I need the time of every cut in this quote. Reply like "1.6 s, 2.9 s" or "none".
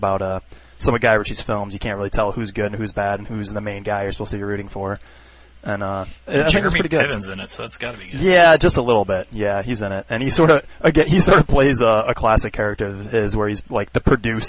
none